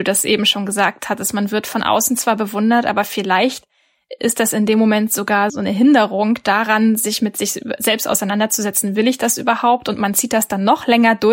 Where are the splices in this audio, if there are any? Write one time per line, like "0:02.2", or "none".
none